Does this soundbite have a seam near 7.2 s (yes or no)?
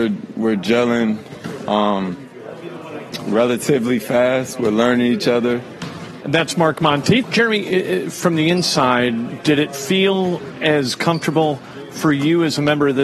yes